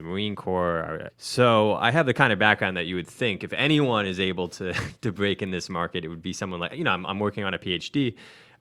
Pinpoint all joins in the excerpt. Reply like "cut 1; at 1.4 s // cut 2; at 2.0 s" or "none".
cut 1; at 1.1 s

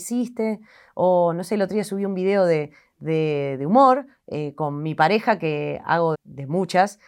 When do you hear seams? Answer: cut 1; at 6.1 s

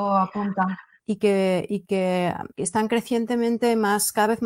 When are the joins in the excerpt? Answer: cut 1; at 1.0 s // cut 2; at 2.5 s

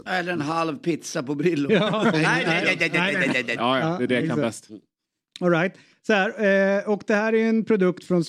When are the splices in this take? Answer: cut 1; at 2.1 s // cut 2; at 3.6 s

